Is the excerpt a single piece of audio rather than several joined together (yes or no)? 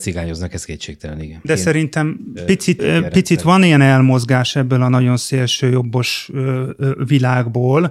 no